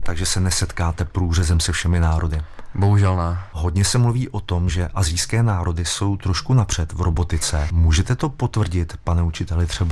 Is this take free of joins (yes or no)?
yes